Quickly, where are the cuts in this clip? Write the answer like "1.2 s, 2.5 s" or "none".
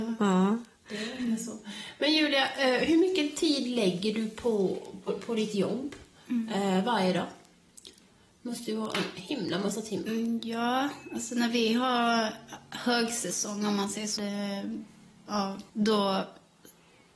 5.1 s, 14.2 s, 15.7 s